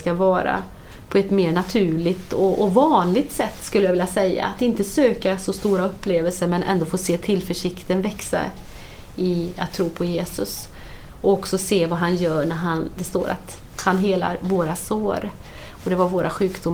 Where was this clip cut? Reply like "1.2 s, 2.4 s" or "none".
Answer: 13.0 s